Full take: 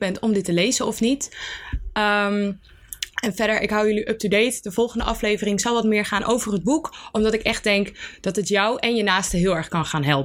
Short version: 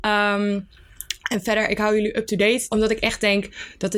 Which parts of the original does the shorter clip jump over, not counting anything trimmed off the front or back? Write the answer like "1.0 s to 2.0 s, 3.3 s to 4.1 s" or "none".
4.6 s to 7.1 s

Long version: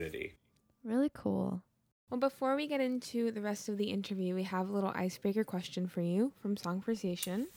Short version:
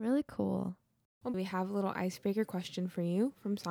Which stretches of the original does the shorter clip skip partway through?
2.2 s to 4.3 s

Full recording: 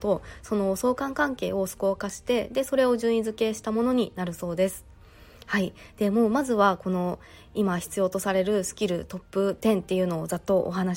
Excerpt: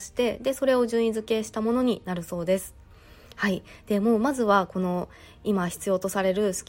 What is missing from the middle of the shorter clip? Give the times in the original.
none

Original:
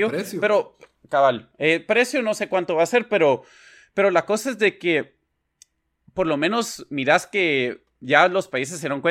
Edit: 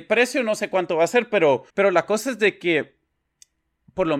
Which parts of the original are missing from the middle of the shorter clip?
3.5 s to 3.9 s

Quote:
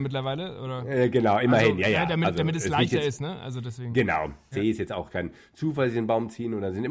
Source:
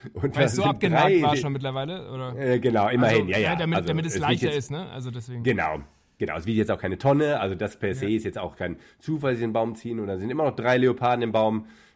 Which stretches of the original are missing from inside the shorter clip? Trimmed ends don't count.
6.0 s to 8.0 s

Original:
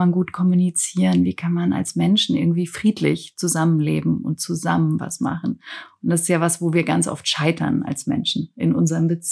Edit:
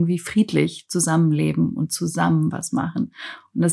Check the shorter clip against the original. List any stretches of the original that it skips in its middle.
none

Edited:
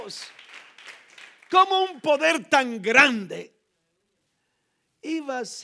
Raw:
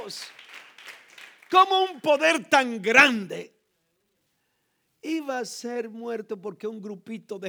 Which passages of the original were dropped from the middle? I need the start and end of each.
none

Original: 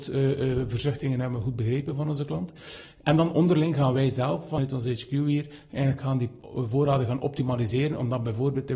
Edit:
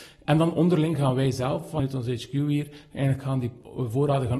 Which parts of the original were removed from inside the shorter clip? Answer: none

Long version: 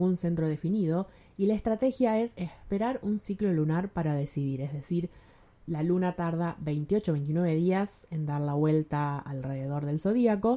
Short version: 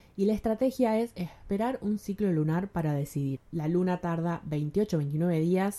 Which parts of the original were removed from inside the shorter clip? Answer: 4.6 s to 5.5 s

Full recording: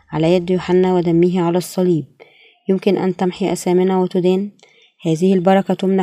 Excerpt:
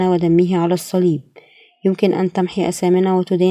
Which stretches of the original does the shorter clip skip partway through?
none

